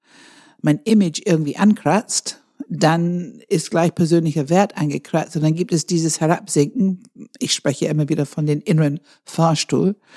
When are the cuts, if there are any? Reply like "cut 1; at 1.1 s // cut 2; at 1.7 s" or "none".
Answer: none